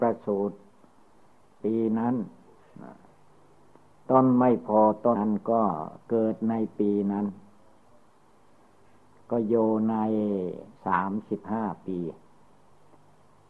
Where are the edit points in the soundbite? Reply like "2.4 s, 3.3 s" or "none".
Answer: 5.1 s, 10.8 s